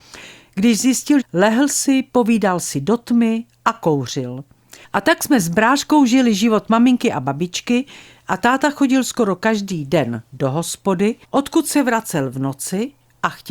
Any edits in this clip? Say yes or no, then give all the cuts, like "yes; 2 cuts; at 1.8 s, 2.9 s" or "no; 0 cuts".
yes; 3 cuts; at 1.2 s, 4.8 s, 11.2 s